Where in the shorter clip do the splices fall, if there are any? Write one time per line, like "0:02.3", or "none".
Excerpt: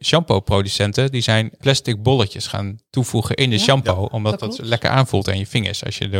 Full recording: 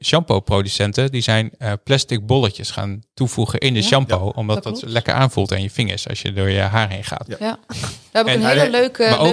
0:01.6